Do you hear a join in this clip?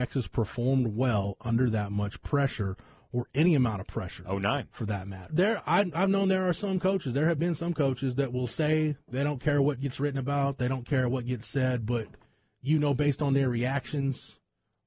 yes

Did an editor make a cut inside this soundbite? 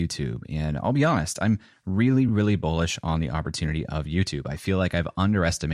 no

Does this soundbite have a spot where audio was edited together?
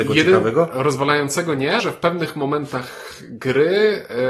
yes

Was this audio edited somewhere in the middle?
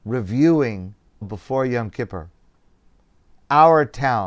yes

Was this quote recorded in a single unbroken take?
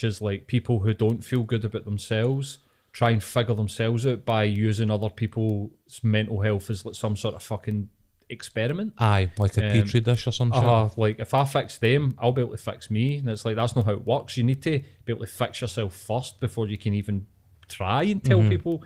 yes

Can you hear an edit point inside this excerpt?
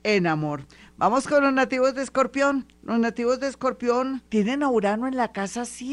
yes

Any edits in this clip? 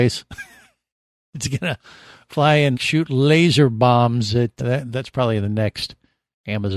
yes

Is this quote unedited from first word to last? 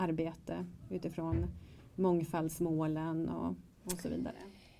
yes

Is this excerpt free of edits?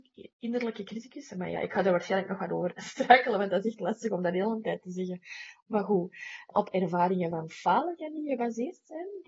no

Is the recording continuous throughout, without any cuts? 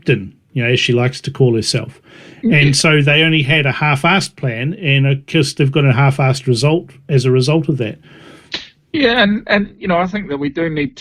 yes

